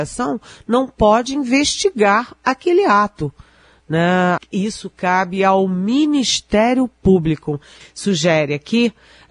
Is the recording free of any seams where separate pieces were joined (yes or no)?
no